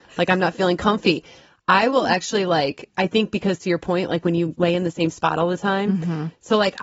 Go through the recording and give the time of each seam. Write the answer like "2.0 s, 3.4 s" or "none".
none

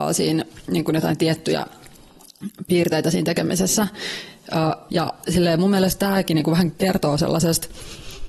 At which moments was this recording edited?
4.9 s

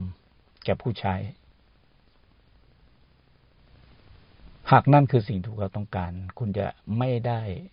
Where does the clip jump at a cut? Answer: none

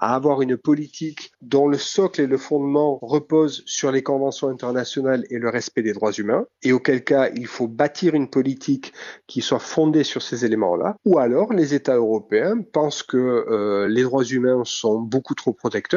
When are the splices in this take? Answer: none

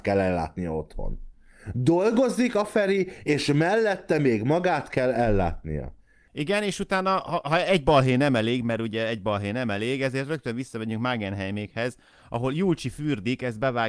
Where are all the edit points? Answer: none

